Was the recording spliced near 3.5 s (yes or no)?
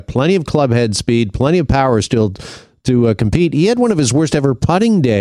no